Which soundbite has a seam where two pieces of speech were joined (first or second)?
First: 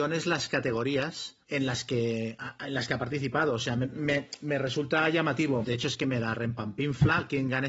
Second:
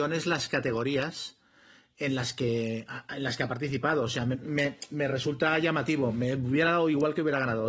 first